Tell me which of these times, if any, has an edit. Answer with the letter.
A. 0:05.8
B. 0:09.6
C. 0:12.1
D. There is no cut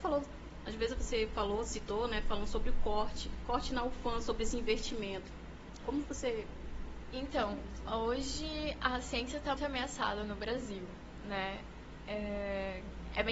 B